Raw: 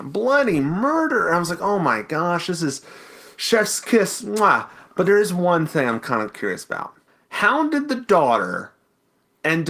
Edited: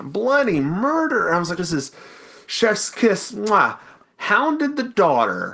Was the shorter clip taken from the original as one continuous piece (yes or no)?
no